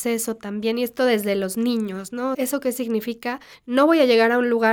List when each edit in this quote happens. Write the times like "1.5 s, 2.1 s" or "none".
2.3 s